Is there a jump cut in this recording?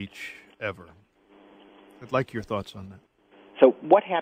no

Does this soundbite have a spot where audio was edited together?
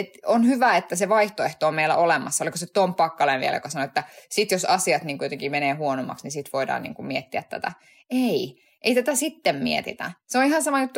no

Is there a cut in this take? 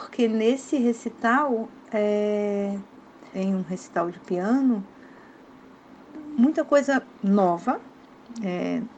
yes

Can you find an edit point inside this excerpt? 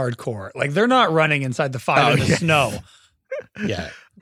no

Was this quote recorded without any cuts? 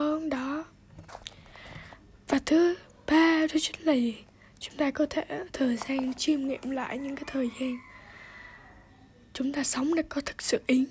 yes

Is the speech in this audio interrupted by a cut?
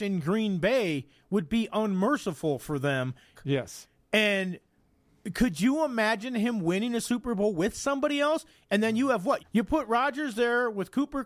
yes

